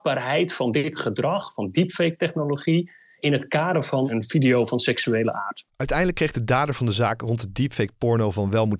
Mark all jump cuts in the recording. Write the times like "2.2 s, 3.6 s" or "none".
5.7 s